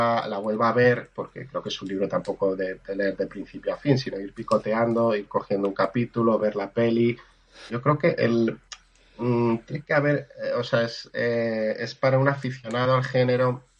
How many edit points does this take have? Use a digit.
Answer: 1